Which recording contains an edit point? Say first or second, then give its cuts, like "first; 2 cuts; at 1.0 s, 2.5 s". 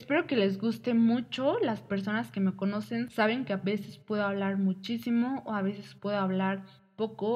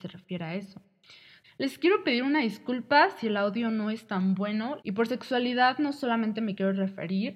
second; 2 cuts; at 1.4 s, 4.8 s